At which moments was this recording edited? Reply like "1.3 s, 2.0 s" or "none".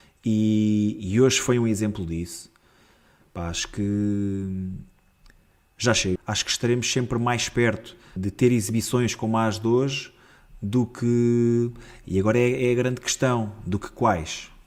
6.2 s, 8.2 s